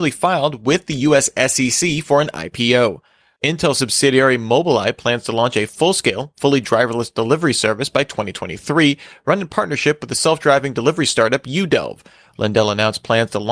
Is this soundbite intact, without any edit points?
no; 2 cuts; at 3.4 s, 12.3 s

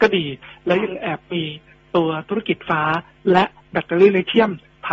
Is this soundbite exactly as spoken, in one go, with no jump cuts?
no; 1 cut; at 2.7 s

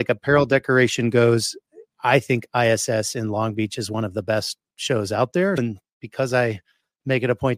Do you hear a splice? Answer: yes; 1 cut; at 5.6 s

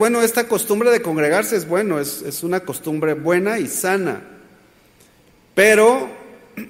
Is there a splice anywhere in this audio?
no; 0 cuts

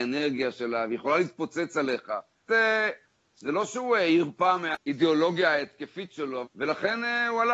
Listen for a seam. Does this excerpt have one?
yes; 2 cuts; at 2.5 s, 6.4 s

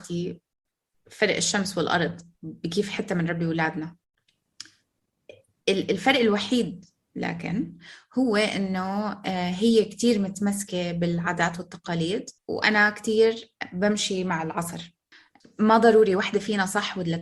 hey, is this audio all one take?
no; 1 cut; at 12.4 s

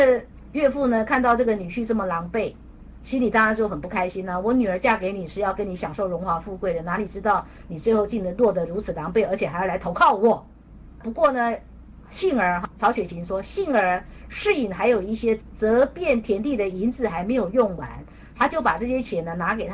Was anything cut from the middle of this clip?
no; 0 cuts

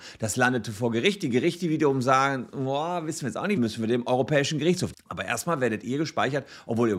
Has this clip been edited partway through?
yes; 2 cuts; at 3.6 s, 4.9 s

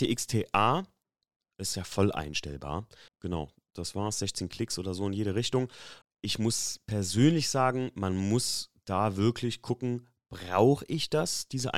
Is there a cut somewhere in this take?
yes; 2 cuts; at 3.1 s, 6.0 s

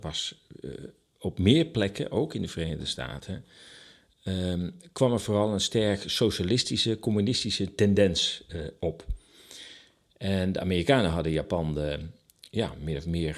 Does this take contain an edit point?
no; 0 cuts

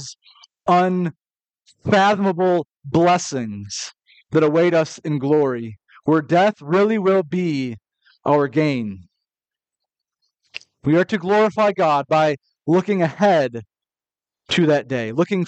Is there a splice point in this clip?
no; 0 cuts

